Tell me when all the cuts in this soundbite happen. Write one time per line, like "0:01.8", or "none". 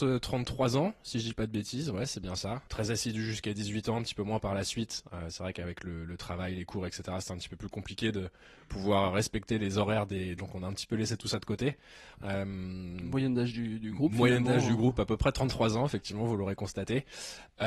0:02.7
0:10.4
0:12.2